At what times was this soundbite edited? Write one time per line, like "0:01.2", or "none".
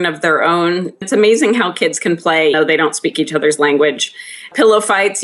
0:02.5